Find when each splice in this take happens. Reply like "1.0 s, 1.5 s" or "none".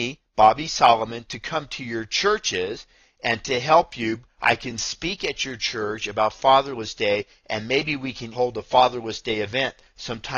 8.3 s